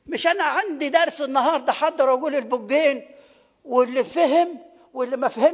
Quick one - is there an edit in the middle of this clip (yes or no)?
yes